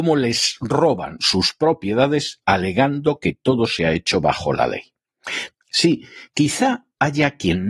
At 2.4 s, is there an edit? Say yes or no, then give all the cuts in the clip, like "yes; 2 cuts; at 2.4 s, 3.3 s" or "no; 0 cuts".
yes; 2 cuts; at 2.4 s, 5.6 s